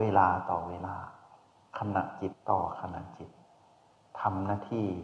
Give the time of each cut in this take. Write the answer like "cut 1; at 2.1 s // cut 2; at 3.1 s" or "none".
cut 1; at 2.3 s

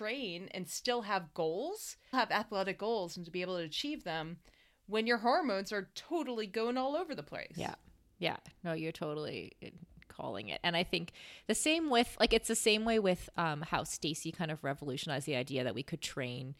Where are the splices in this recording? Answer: cut 1; at 2.1 s

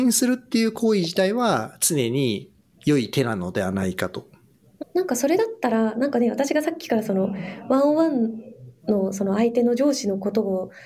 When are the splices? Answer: cut 1; at 4.8 s

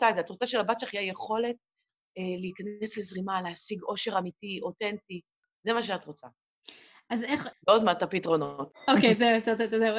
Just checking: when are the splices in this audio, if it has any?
none

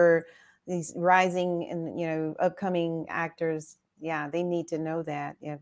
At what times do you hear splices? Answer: none

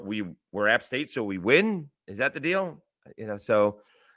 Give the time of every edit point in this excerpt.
none

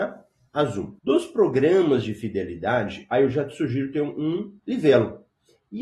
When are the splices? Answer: cut 1; at 1.0 s

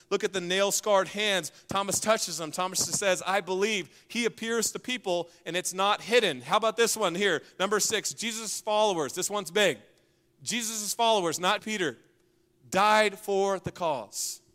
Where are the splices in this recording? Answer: cut 1; at 11.6 s

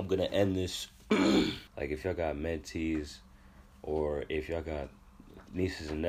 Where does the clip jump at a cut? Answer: cut 1; at 1.7 s

